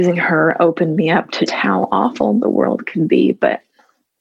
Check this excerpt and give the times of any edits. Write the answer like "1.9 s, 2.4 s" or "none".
1.5 s